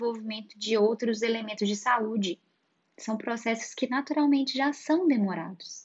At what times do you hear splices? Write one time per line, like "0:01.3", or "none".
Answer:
none